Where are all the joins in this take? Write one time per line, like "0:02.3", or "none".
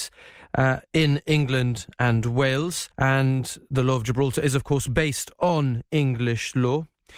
0:02.9